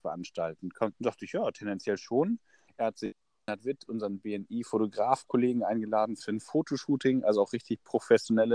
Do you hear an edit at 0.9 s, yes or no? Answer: yes